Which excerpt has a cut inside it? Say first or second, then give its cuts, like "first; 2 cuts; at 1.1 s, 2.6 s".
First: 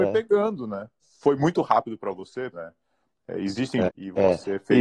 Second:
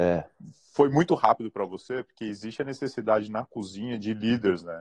first; 3 cuts; at 1.0 s, 2.5 s, 3.9 s